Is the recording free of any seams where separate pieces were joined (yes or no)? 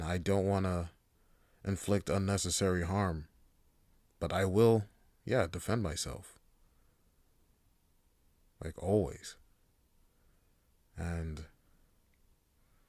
yes